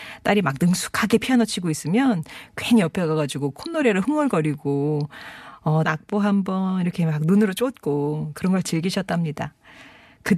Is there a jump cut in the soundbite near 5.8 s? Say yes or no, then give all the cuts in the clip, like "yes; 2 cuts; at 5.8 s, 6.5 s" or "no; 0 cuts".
yes; 1 cut; at 5.8 s